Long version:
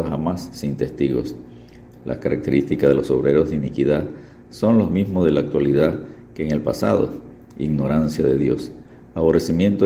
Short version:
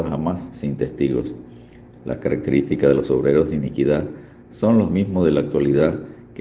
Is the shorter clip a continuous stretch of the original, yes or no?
yes